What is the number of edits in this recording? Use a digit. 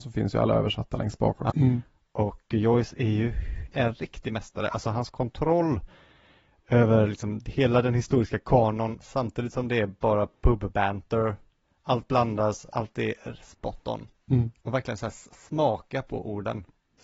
1